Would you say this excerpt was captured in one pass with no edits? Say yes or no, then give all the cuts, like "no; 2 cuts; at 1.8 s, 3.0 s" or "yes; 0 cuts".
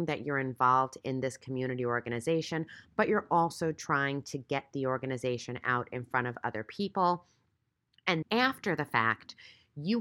no; 1 cut; at 8.2 s